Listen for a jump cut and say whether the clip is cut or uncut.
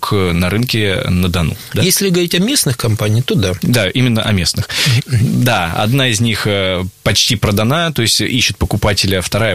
cut